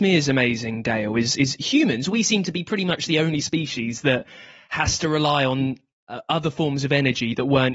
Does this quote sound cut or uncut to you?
uncut